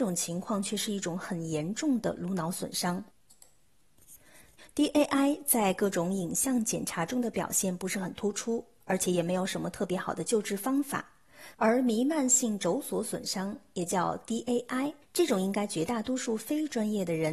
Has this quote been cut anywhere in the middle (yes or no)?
yes